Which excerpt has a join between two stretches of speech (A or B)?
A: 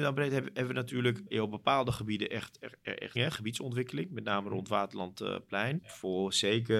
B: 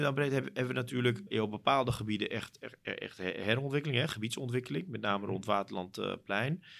A